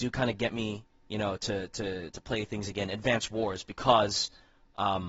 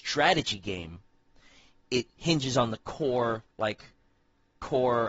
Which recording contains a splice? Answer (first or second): second